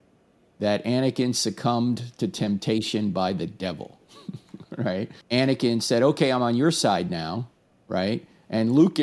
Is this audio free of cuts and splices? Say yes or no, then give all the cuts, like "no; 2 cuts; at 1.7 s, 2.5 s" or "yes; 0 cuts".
no; 1 cut; at 5.2 s